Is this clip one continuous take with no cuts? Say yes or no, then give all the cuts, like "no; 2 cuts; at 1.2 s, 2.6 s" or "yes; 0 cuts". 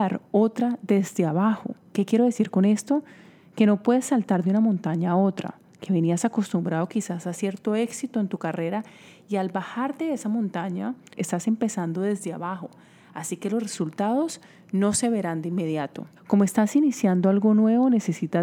no; 2 cuts; at 11.1 s, 16.2 s